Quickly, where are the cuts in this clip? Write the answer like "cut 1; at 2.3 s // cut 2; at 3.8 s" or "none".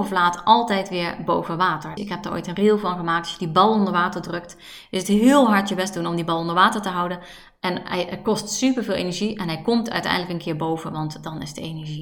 cut 1; at 2.0 s